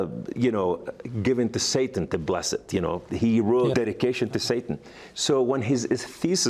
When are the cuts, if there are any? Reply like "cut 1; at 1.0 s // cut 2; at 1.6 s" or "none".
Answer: cut 1; at 3.7 s